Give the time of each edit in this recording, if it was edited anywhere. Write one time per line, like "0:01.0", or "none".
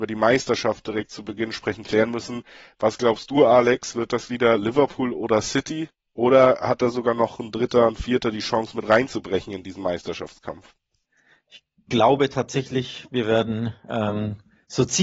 none